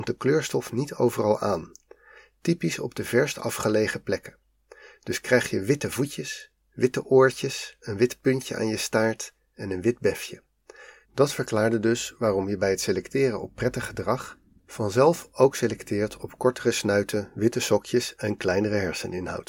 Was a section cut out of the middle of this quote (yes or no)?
yes